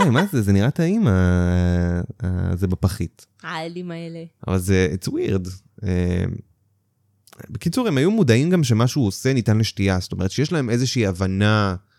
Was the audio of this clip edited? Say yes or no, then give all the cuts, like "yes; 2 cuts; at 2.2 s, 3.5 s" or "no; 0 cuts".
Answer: no; 0 cuts